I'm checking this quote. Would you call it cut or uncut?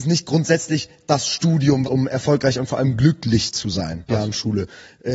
cut